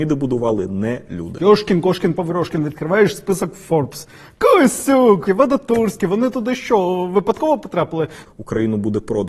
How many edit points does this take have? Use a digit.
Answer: 3